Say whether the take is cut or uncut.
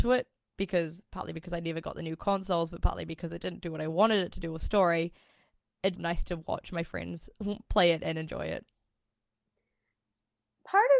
cut